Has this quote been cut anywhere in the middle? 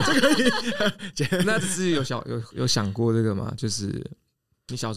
yes; 1 cut; at 1.6 s

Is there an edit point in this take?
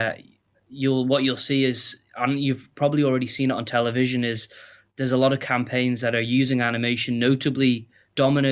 no; 0 cuts

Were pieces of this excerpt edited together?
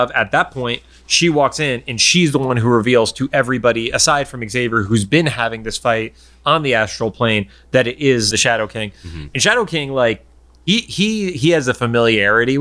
no; 0 cuts

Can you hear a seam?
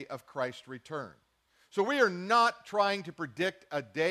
no; 0 cuts

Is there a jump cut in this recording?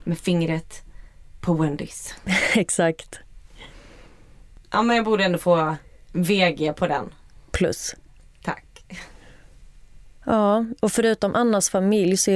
no; 0 cuts

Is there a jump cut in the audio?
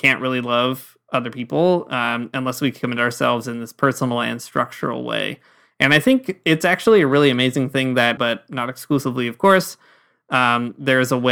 yes; 1 cut; at 8.2 s

